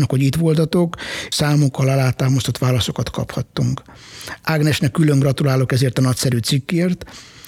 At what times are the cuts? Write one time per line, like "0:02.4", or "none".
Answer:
0:01.3